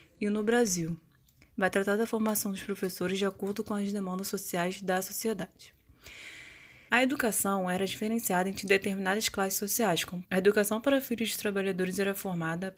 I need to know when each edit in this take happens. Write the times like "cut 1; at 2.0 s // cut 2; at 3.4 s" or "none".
cut 1; at 6.9 s // cut 2; at 10.2 s